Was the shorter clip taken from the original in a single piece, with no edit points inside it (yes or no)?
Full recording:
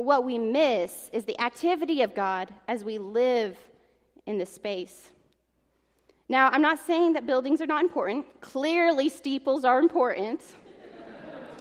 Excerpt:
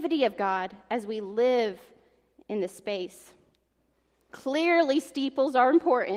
no